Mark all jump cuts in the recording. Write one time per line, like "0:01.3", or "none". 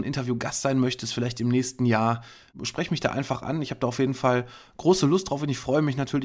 none